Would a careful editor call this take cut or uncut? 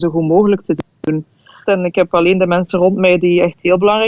cut